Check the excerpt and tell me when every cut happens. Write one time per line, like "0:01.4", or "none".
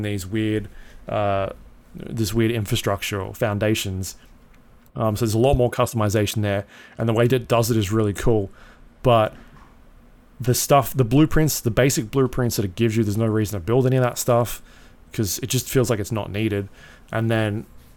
none